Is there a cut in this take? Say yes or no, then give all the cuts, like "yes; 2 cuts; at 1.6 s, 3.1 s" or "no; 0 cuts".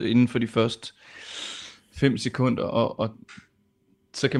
no; 0 cuts